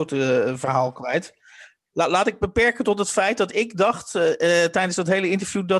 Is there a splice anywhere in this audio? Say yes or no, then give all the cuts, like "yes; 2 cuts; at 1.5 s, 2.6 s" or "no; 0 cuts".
no; 0 cuts